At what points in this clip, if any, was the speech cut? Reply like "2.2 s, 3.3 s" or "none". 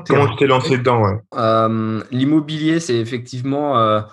1.3 s